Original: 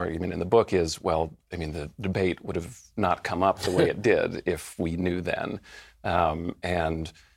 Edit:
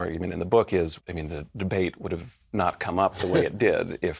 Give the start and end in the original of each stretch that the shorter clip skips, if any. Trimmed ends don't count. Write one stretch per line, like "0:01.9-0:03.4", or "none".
0:01.0-0:01.4